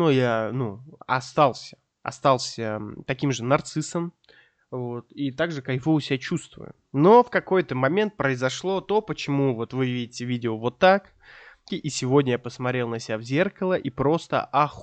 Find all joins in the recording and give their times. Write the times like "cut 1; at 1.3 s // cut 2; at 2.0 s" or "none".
cut 1; at 11.7 s